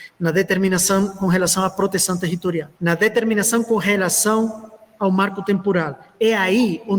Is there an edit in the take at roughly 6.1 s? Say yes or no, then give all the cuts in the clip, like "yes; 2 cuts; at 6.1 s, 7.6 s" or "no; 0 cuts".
no; 1 cut; at 2.7 s